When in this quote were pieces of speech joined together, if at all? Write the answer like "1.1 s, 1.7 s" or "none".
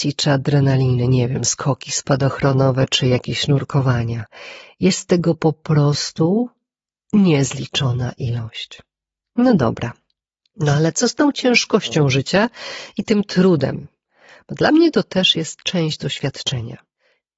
none